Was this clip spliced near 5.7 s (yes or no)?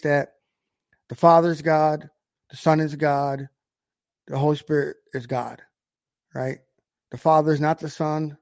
no